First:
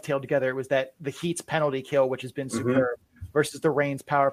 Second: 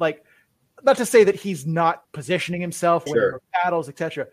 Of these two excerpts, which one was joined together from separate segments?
second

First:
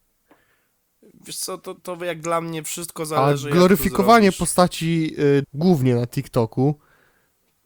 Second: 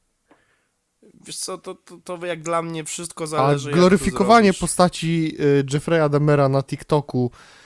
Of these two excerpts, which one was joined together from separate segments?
first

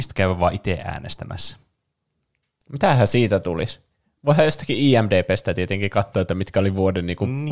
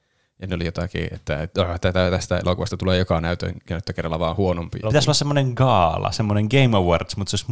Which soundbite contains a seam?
second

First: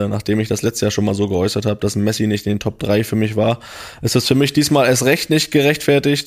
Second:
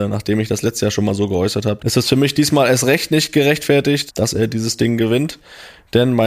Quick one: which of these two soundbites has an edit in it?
second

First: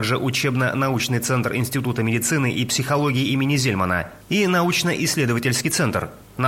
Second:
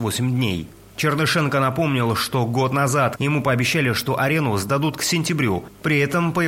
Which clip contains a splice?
second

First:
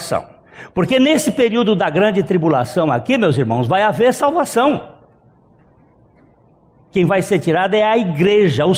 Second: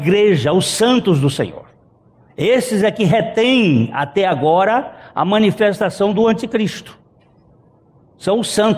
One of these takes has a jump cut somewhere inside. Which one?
first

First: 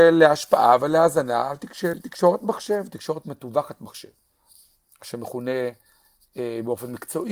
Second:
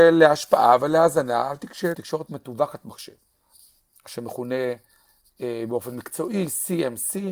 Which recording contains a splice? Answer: second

